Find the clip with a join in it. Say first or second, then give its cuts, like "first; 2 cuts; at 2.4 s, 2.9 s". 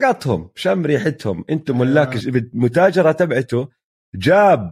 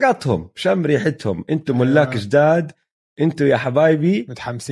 first; 1 cut; at 2.2 s